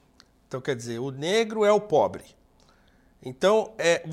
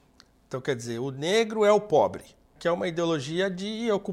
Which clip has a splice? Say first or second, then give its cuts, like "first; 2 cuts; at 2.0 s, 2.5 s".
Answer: second; 1 cut; at 2.6 s